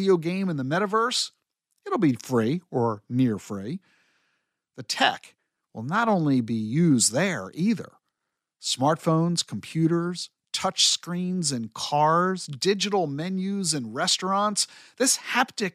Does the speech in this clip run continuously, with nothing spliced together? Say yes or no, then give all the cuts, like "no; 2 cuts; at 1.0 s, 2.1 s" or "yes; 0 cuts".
yes; 0 cuts